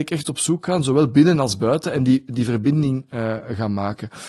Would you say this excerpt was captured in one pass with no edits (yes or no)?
yes